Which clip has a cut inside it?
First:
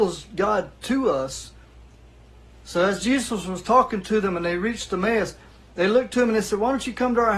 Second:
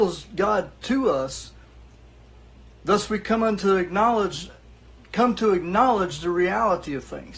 first; 1 cut; at 2.5 s

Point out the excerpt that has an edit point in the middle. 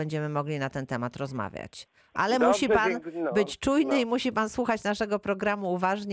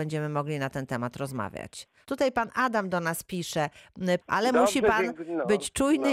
second; 2 cuts; at 2.0 s, 4.2 s

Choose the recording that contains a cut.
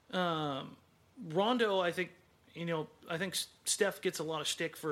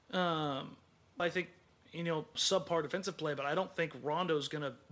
second; 2 cuts; at 1.2 s, 2.4 s

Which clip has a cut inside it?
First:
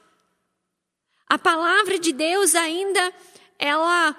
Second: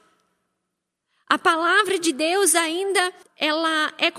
second; 1 cut; at 3.2 s

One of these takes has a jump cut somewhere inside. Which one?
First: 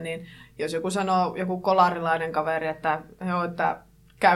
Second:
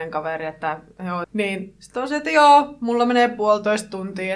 second; 1 cut; at 1.2 s

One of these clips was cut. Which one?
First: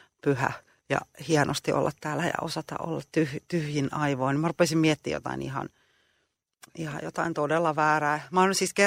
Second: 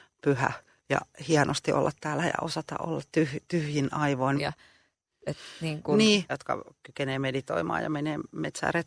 second; 2 cuts; at 4.4 s, 6.3 s

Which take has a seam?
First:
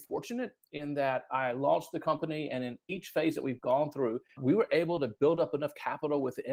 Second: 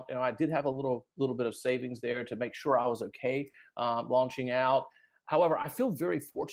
first; 1 cut; at 4.4 s

